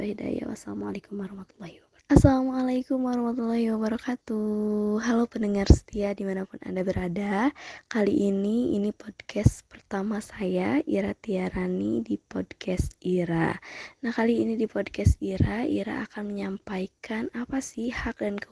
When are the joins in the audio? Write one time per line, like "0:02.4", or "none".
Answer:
0:02.0